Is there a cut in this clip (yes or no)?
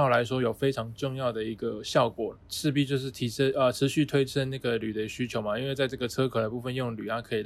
yes